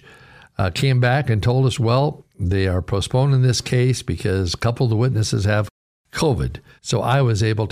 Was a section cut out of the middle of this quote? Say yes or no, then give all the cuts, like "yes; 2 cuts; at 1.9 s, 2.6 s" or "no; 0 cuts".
yes; 1 cut; at 6.8 s